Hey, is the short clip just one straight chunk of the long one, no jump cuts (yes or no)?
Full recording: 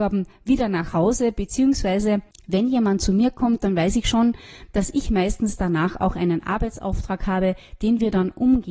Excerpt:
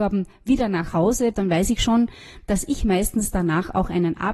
no